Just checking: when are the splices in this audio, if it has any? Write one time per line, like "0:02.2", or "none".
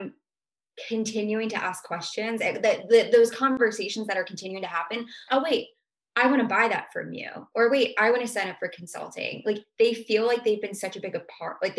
0:05.3